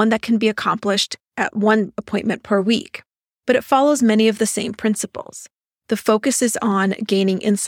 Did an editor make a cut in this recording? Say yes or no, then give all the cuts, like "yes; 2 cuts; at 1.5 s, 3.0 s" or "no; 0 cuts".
no; 0 cuts